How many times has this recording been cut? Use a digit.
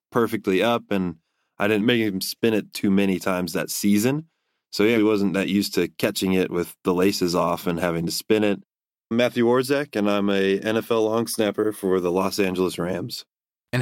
2